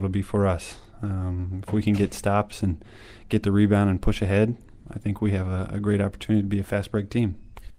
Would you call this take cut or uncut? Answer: uncut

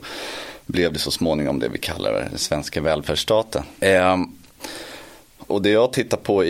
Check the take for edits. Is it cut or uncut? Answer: cut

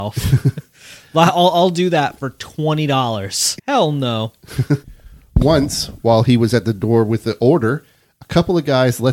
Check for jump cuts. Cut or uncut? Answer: cut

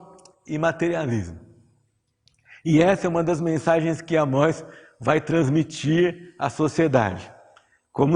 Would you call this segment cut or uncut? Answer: uncut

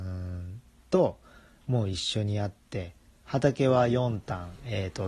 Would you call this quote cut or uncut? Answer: uncut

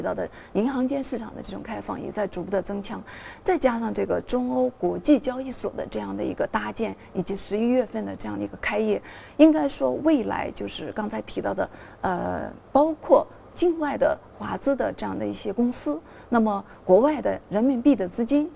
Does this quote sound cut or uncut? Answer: uncut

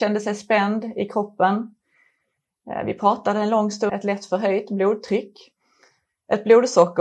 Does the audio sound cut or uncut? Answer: cut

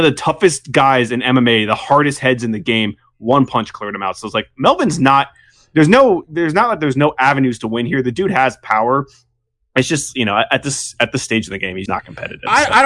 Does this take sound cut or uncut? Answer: cut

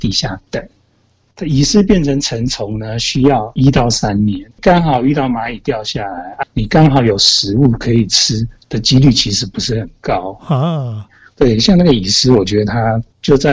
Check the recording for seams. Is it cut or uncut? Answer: cut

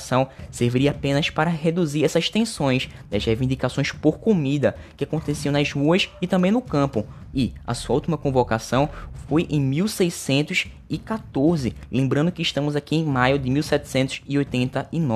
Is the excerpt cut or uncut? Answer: cut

